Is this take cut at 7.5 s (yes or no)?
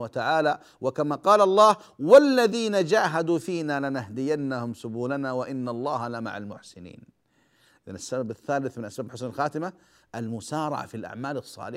no